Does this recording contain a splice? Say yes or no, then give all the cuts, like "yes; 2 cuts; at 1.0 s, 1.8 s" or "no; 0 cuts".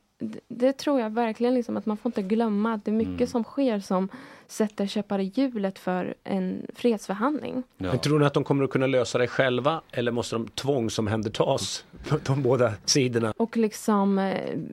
yes; 1 cut; at 13.3 s